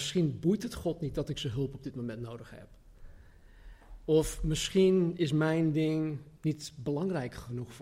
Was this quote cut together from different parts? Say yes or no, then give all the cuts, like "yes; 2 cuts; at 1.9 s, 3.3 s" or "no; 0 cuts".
yes; 1 cut; at 6.4 s